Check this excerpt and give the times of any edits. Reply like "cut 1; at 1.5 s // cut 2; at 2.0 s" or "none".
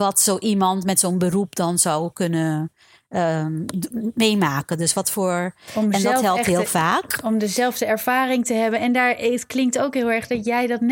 cut 1; at 5.7 s